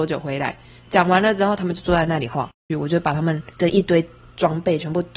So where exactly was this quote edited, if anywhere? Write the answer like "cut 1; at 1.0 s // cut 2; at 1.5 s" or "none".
cut 1; at 2.7 s